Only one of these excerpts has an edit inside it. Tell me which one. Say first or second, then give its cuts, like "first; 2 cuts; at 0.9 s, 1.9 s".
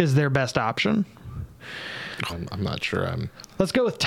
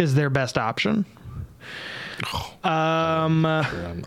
first; 1 cut; at 2.3 s